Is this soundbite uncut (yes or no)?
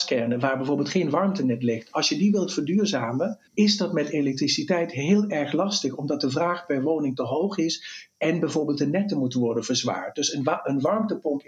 no